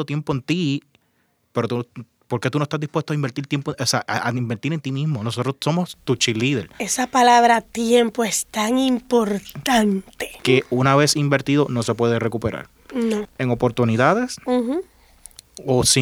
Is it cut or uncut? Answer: cut